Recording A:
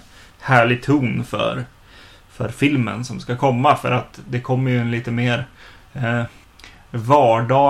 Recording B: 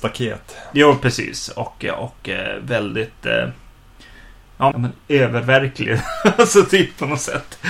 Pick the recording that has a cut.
B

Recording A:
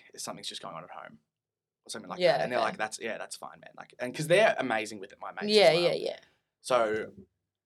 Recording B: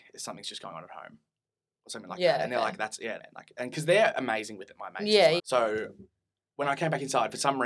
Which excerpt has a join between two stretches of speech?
B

